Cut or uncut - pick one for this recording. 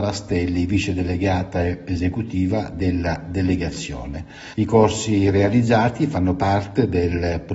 cut